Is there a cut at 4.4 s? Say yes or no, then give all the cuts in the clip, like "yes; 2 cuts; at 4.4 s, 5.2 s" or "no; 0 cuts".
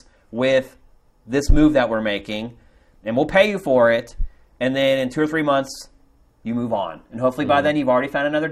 no; 0 cuts